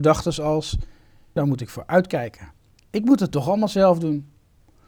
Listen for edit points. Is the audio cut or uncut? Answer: cut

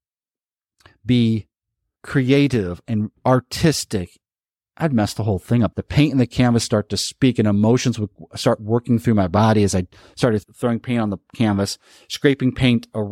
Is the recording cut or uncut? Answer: cut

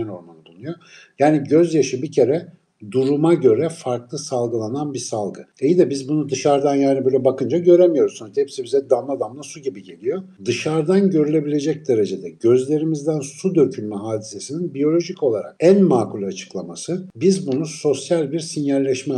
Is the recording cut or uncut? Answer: uncut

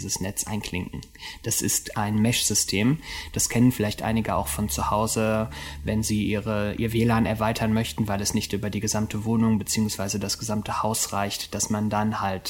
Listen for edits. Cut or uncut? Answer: uncut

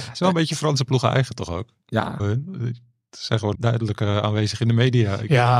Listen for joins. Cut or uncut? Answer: cut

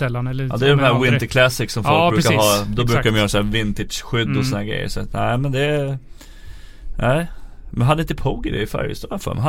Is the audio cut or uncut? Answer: uncut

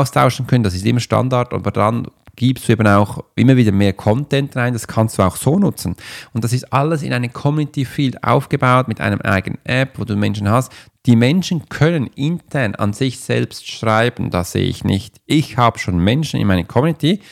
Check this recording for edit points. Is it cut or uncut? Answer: uncut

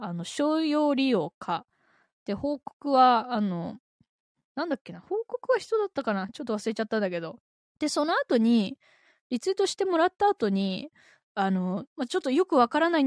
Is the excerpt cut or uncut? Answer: cut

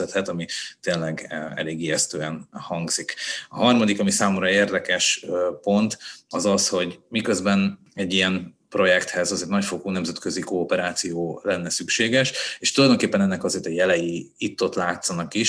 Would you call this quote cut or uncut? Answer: uncut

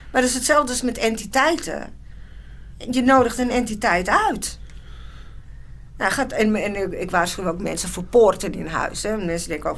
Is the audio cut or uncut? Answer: uncut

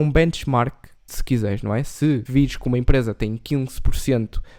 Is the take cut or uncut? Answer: cut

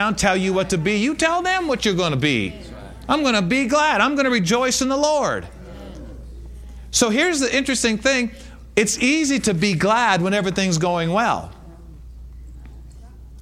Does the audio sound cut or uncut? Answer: uncut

